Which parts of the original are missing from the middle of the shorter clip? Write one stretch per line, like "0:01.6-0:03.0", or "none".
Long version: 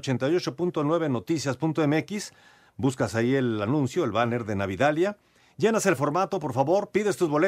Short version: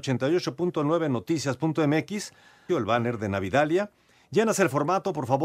0:02.7-0:04.0